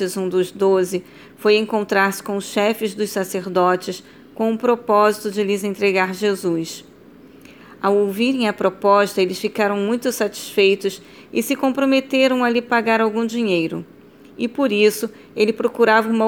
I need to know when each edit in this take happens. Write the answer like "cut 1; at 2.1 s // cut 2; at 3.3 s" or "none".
none